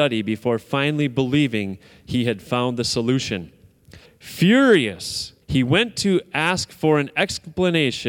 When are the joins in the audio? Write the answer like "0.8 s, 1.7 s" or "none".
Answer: 4.1 s, 5.4 s

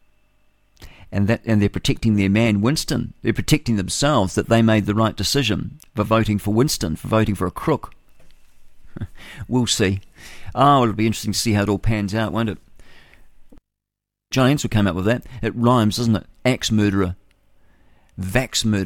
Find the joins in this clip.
14.3 s

